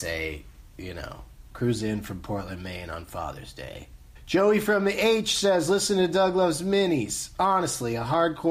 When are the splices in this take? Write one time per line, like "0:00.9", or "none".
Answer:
0:04.2